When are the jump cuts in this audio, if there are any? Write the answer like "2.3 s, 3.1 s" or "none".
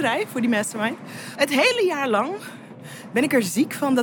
1.4 s